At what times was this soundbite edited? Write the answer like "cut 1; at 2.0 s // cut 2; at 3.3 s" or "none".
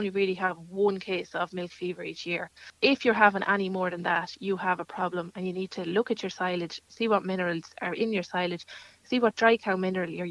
none